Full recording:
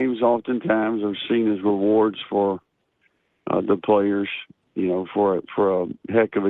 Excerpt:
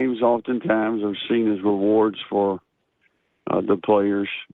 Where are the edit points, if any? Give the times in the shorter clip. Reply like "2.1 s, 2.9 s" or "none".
none